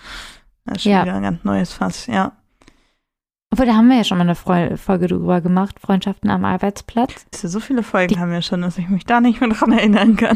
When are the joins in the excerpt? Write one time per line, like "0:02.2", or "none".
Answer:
0:07.3